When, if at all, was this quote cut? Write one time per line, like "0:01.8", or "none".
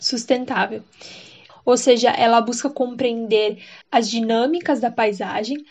0:01.5
0:03.8